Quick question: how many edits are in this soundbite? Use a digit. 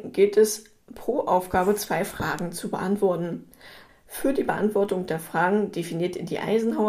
1